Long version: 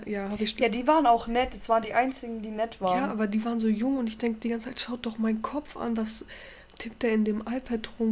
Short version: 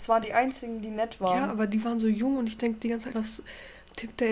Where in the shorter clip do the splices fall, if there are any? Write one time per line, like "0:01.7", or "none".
0:03.1